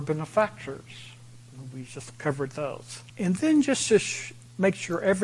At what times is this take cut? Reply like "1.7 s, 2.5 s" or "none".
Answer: 3.1 s